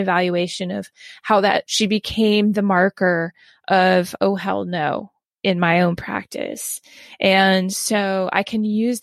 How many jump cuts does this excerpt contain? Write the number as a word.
one